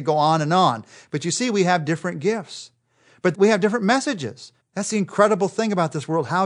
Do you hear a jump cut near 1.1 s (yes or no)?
no